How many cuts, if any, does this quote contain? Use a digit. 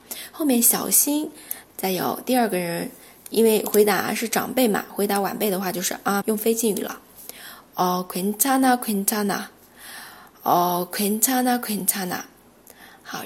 2